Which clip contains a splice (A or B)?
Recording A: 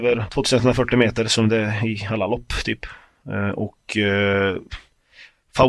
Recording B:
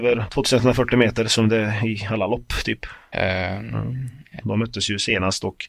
B